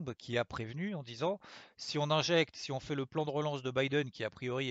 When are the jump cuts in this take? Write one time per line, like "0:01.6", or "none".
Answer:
none